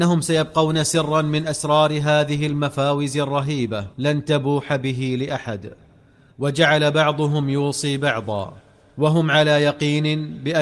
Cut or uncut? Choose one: cut